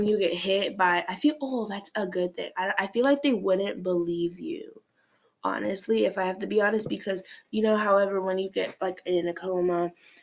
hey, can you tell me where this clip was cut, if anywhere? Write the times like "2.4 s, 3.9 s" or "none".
none